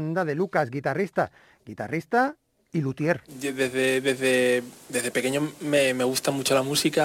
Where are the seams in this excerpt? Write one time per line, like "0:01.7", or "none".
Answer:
none